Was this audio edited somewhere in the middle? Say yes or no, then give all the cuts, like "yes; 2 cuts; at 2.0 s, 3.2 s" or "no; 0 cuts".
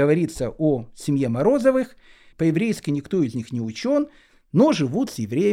yes; 1 cut; at 2.3 s